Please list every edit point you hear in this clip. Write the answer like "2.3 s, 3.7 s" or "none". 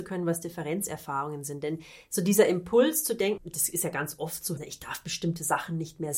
3.4 s, 4.6 s